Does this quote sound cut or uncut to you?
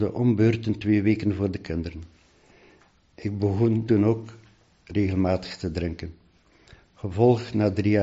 cut